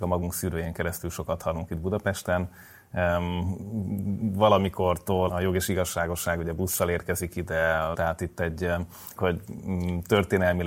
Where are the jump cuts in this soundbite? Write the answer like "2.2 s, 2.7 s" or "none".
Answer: 5.3 s, 7.9 s, 9.2 s